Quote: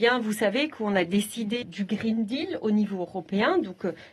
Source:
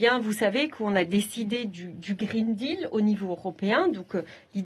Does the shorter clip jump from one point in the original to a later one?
yes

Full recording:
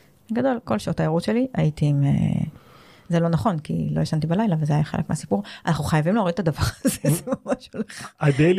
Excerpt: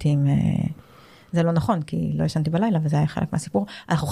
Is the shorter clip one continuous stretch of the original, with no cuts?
yes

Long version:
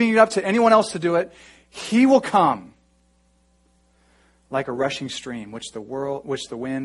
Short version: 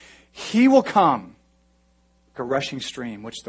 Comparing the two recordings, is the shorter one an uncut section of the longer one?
no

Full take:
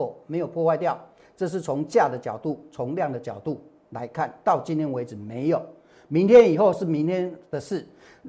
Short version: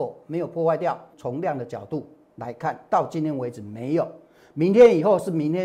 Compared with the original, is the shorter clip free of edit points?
no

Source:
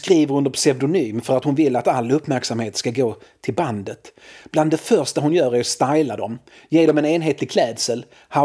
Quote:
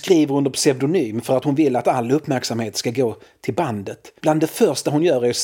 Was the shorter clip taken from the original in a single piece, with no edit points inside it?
no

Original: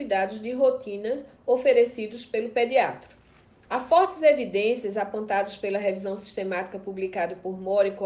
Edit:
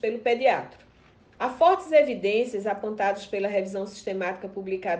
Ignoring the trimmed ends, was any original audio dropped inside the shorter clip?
no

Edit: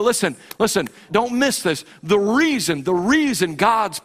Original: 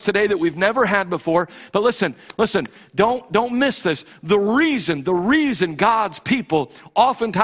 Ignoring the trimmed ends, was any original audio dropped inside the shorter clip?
yes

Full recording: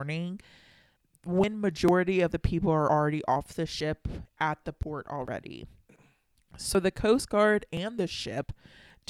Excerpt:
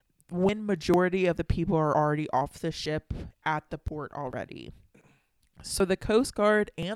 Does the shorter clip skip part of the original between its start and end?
no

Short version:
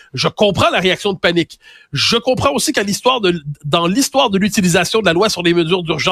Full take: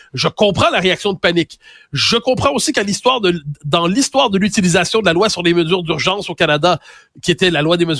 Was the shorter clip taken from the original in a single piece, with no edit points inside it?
yes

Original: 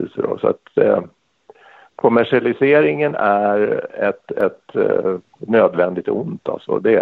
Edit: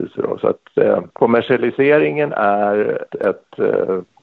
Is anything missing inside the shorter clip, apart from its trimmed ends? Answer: yes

